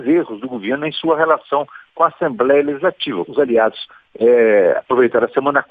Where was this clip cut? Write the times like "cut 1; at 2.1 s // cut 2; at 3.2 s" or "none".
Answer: cut 1; at 3.3 s